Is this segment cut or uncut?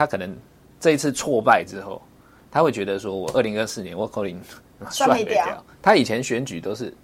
uncut